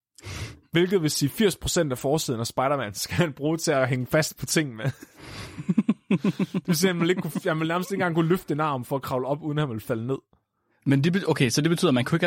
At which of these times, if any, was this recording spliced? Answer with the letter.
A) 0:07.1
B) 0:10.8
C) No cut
C